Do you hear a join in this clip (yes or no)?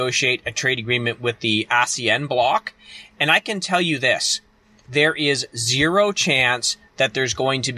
no